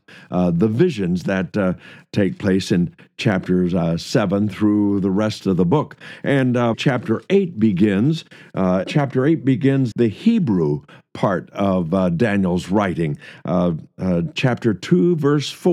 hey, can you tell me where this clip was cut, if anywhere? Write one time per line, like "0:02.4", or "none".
0:06.7
0:08.8
0:09.9